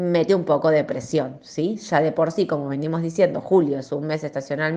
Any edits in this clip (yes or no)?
no